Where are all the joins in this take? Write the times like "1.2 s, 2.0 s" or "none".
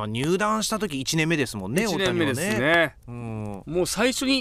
none